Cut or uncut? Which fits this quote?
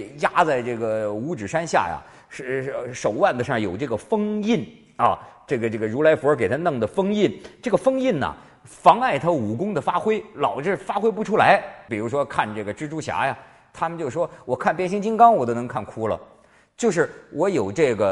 cut